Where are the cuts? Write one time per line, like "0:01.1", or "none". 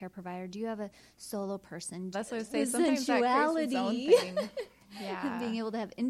0:02.1